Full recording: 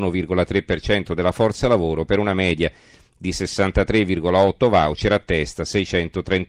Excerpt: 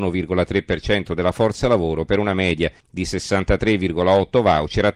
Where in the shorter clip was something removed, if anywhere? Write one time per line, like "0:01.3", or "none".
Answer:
0:02.8